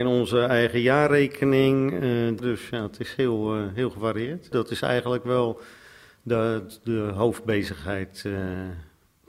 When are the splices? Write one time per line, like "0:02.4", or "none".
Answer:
0:04.5